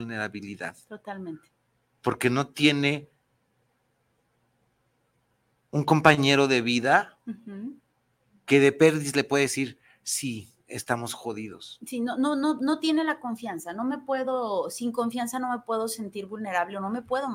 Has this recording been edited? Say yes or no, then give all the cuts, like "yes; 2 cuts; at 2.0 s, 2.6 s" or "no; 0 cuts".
no; 0 cuts